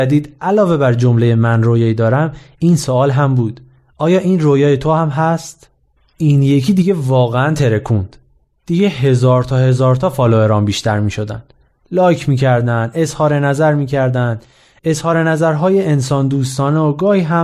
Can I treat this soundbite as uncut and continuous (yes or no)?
yes